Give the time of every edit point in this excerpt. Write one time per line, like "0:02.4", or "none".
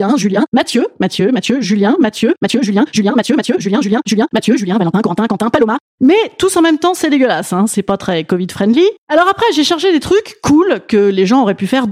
none